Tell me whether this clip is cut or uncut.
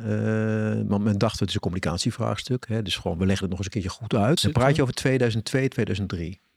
cut